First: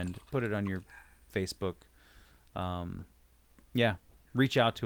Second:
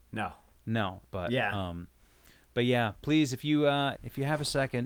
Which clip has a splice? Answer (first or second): second